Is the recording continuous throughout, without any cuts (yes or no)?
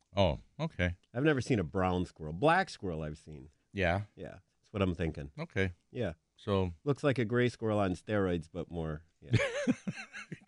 no